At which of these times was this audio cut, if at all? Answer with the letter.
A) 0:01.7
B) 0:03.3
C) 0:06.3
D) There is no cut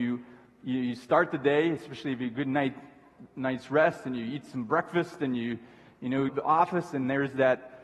C